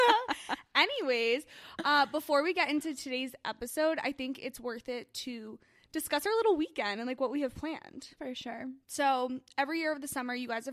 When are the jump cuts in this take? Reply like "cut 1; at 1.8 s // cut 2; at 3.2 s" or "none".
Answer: cut 1; at 8.8 s